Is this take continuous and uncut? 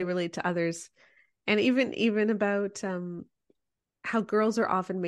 yes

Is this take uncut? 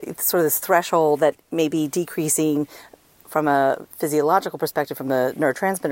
yes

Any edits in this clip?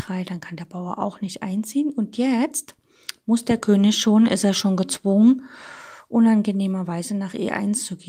no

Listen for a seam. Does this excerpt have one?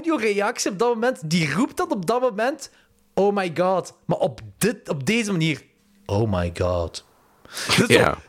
no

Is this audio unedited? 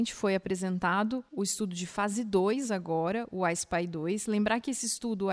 yes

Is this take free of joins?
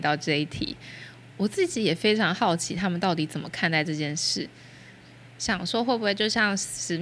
yes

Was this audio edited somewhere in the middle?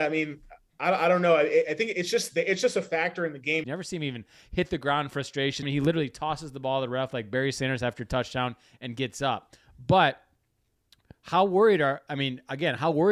yes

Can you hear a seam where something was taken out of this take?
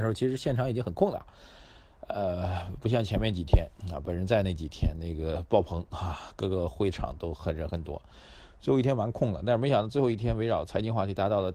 no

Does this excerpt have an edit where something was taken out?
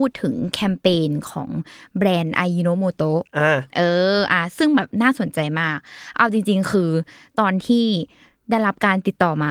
no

